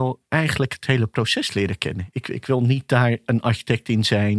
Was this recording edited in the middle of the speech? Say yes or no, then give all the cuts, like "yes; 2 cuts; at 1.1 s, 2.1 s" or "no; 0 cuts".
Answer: no; 0 cuts